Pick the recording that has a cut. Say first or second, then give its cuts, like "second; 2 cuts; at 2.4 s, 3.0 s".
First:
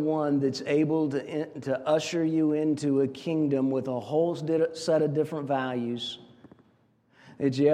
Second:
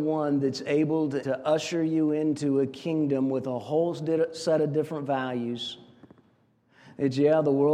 second; 1 cut; at 1.2 s